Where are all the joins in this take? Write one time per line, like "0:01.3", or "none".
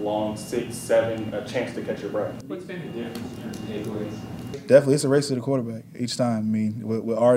0:01.3
0:02.4
0:04.5